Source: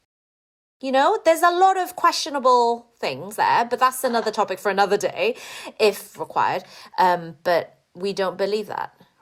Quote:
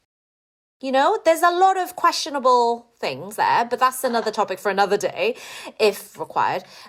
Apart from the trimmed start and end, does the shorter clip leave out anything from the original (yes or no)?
no